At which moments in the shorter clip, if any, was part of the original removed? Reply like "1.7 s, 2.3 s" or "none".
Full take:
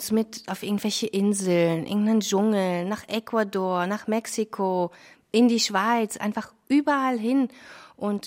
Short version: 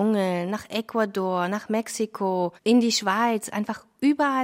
2.6 s